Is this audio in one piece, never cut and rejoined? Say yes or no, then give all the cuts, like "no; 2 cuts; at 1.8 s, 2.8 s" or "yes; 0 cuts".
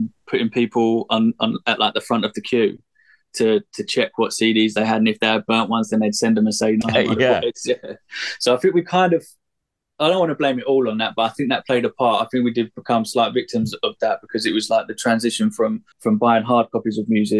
no; 2 cuts; at 6.8 s, 15.9 s